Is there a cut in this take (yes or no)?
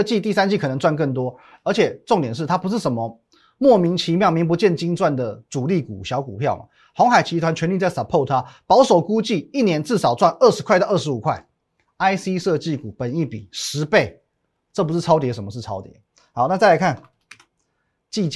no